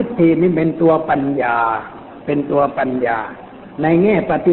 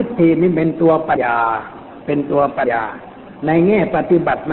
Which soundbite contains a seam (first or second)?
second